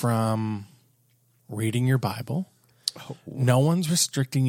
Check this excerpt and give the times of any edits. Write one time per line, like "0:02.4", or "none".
none